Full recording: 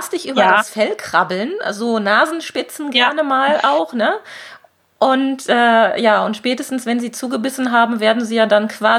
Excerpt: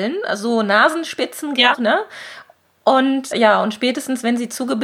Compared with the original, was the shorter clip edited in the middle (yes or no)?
yes